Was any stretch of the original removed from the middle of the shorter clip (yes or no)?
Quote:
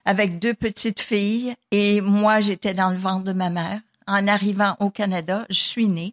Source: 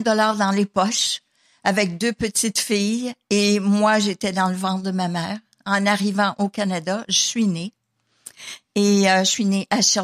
no